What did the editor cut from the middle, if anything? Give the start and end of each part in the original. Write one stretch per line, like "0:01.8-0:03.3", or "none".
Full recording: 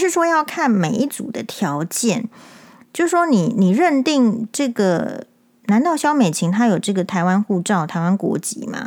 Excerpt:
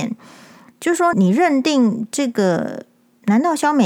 0:03.3-0:03.5